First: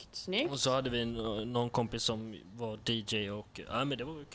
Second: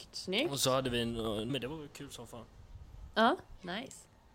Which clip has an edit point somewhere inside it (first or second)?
second